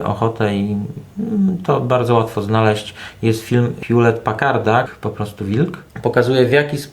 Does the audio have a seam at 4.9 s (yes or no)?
yes